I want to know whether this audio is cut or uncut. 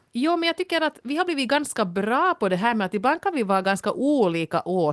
uncut